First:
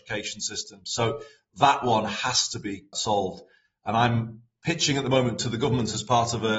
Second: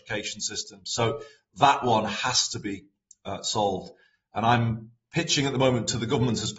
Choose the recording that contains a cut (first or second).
first